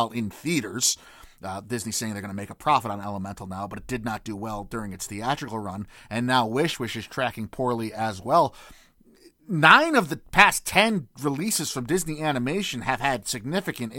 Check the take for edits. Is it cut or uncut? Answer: uncut